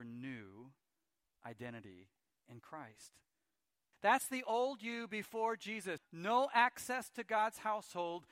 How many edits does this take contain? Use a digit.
2